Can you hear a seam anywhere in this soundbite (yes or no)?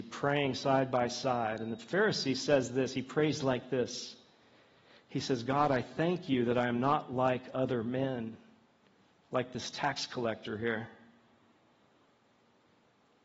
no